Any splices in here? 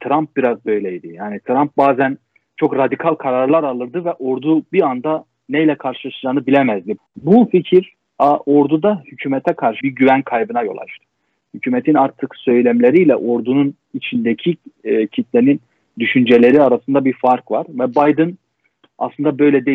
yes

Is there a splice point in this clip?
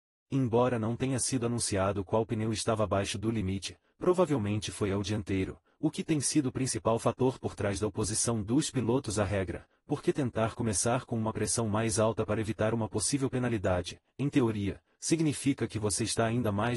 no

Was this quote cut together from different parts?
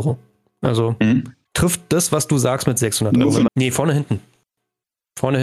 yes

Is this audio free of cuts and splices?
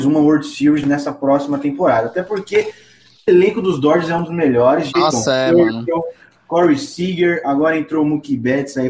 no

